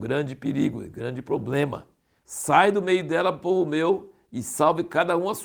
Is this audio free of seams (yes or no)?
no